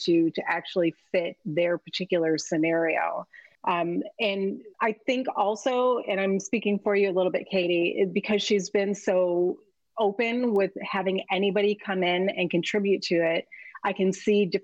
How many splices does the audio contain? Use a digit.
2